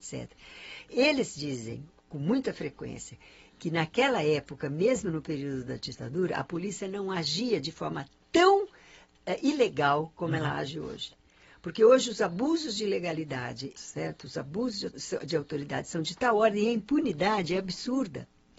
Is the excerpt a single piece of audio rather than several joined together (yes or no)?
no